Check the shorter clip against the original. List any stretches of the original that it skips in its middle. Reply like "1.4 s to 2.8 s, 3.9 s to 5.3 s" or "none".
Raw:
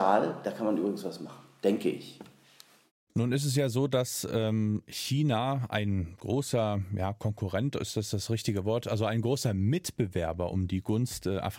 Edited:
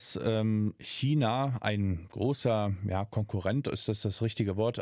none